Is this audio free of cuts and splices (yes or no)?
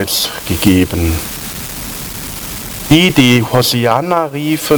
yes